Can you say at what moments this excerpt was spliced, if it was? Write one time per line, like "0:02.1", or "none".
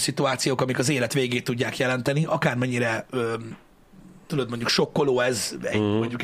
none